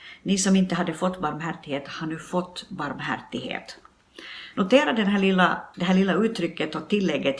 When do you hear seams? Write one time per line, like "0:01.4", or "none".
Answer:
0:04.5
0:05.7

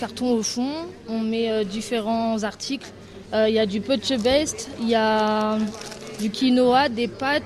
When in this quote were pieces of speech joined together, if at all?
none

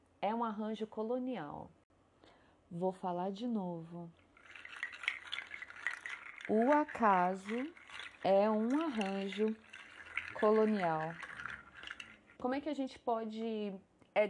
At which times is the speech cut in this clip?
0:12.4

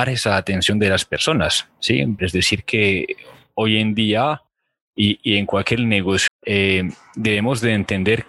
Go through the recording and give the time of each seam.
0:02.2
0:06.3

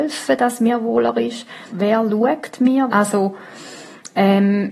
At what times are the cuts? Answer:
0:01.7
0:02.9

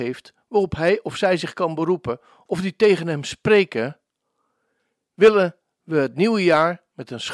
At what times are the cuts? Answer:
none

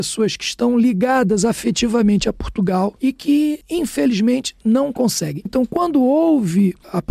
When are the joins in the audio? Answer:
0:05.5

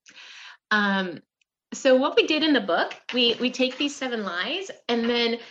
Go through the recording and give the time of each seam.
none

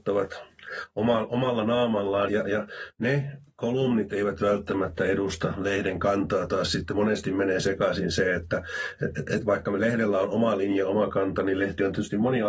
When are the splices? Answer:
0:02.3

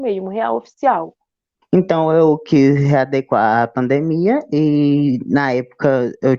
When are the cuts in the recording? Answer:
0:01.6

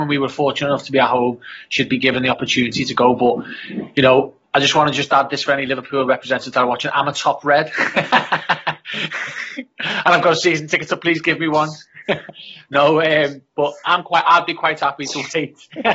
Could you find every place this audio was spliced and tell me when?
none

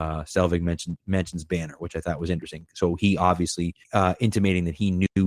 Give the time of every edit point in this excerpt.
0:03.8

